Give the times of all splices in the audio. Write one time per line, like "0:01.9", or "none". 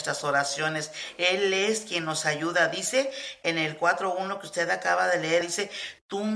0:05.4